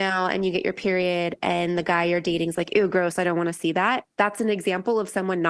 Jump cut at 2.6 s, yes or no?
no